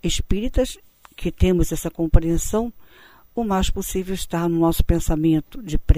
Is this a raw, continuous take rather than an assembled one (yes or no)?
yes